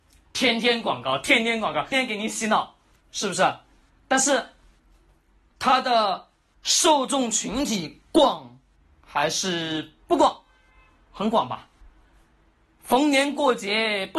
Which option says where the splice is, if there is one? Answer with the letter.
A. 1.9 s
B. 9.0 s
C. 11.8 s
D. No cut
A